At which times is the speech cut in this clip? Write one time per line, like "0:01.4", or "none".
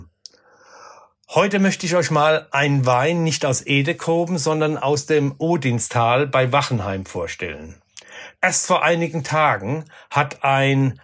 0:08.4